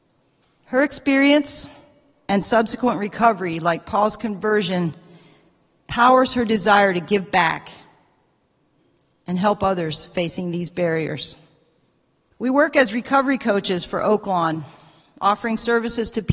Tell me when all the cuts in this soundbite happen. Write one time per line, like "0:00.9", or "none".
0:12.3